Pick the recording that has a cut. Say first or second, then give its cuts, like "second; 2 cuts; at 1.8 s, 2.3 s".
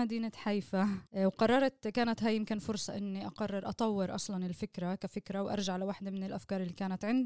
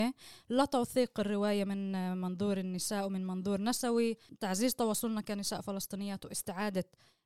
first; 1 cut; at 1.1 s